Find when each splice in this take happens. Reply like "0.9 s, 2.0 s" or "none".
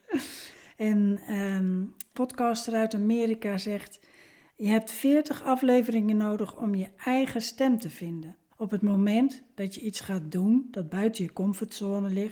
2.1 s, 8.5 s